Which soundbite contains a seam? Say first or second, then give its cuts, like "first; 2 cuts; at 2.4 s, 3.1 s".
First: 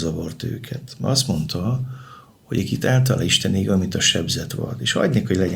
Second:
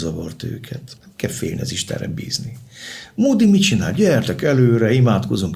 second; 1 cut; at 0.9 s